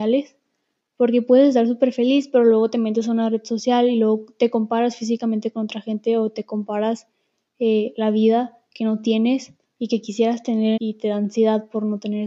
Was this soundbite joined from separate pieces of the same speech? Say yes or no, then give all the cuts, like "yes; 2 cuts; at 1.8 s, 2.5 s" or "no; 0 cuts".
yes; 1 cut; at 10.8 s